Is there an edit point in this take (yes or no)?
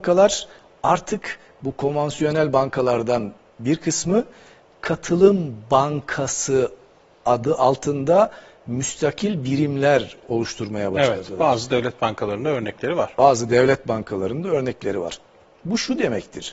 no